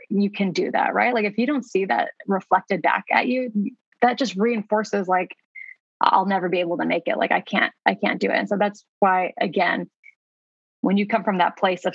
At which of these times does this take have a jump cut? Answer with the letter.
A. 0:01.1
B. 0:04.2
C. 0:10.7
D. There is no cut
D